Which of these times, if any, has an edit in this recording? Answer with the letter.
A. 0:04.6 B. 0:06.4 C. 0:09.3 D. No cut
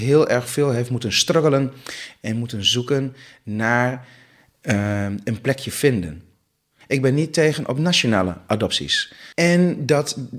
C